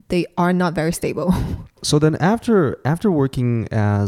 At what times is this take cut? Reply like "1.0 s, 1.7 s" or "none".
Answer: none